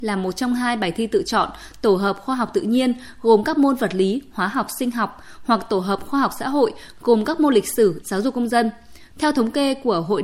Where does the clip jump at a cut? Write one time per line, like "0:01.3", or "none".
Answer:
0:08.0
0:09.1